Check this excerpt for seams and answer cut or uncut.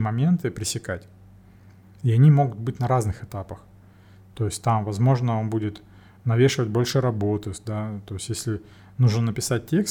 uncut